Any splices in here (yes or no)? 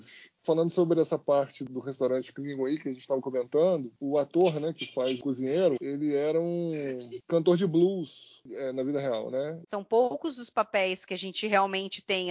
yes